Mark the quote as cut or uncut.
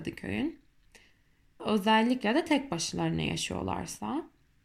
cut